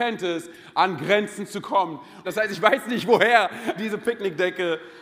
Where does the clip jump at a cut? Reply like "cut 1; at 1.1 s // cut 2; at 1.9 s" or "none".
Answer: cut 1; at 2.2 s // cut 2; at 3.8 s

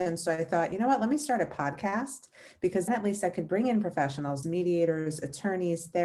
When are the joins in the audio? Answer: cut 1; at 2.9 s // cut 2; at 4.4 s

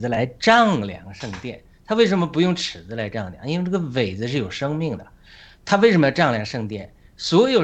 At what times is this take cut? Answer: none

